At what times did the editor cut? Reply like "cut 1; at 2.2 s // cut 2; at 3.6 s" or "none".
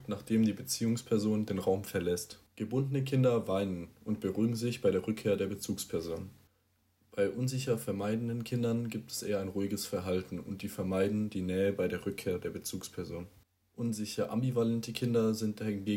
cut 1; at 2.5 s